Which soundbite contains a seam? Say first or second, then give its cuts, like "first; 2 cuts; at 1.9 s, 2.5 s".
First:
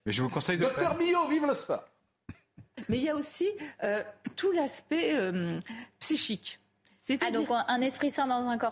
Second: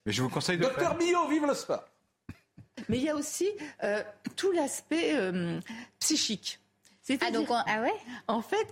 second; 1 cut; at 7.7 s